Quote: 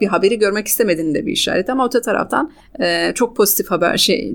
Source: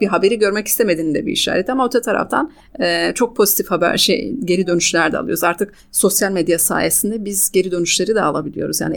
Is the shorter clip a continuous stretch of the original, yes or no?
yes